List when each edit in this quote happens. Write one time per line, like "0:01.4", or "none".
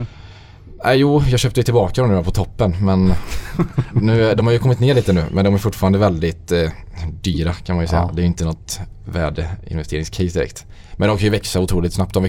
none